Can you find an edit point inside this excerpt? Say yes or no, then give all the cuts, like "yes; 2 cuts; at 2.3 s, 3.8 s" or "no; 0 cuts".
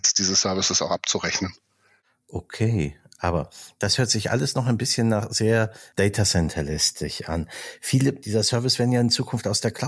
no; 0 cuts